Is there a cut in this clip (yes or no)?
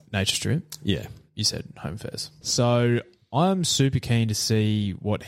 yes